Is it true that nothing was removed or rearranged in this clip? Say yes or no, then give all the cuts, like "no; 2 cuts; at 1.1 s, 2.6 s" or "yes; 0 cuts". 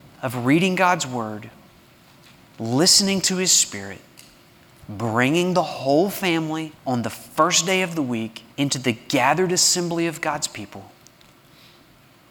no; 3 cuts; at 4.8 s, 6.8 s, 8.5 s